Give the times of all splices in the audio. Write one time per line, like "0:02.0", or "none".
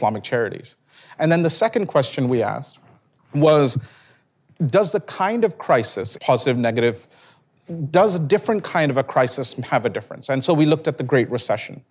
0:06.2